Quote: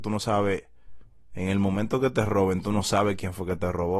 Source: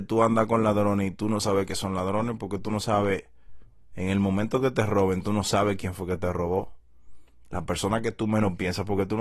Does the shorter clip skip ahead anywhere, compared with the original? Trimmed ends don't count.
no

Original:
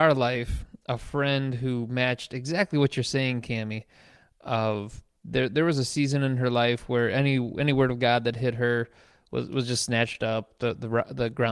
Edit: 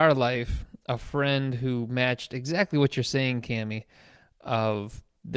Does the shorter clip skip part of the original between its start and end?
no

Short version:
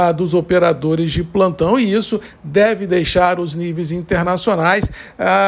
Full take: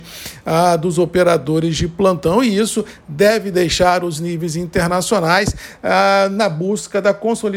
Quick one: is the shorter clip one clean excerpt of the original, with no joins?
yes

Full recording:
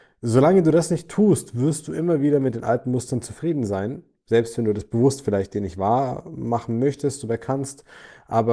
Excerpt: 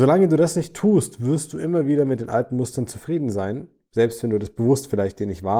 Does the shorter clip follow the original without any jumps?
yes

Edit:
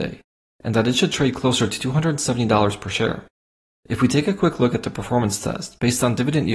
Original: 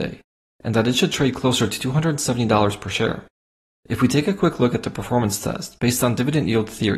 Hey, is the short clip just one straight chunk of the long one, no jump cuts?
yes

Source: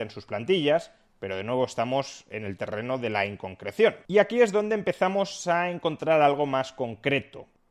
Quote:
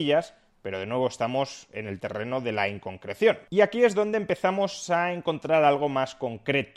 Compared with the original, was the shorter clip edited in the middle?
no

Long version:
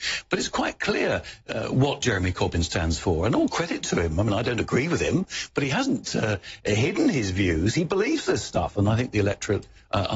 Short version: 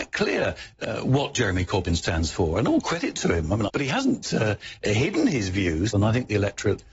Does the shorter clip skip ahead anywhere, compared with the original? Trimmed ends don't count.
yes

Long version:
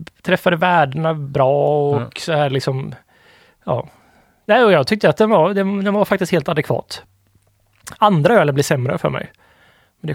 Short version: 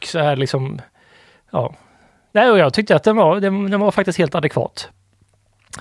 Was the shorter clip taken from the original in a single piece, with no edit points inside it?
yes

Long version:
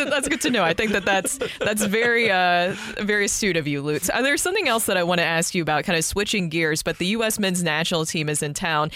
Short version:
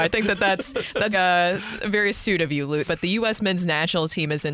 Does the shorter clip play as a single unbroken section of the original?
no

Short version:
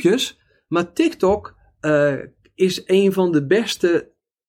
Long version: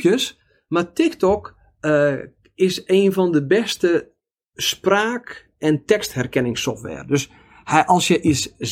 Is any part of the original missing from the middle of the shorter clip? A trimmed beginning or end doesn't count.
no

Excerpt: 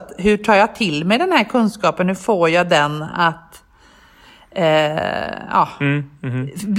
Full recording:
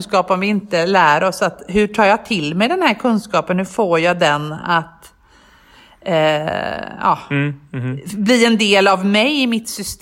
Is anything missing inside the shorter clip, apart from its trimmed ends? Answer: no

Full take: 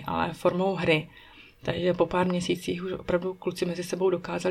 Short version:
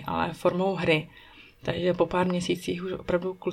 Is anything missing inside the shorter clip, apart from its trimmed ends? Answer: no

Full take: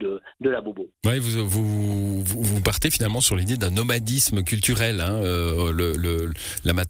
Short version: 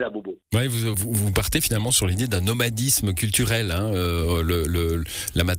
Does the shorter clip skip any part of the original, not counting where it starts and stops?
yes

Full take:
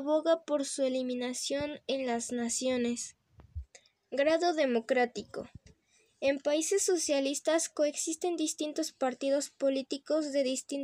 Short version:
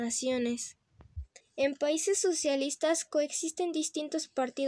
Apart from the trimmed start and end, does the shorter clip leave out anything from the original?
yes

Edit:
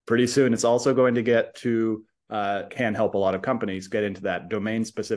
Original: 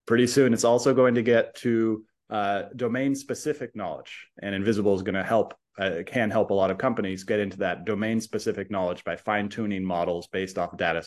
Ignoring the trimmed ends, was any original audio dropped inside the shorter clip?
yes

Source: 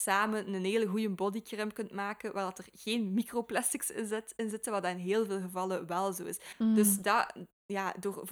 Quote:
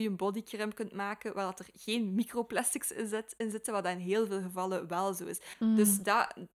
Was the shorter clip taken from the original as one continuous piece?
yes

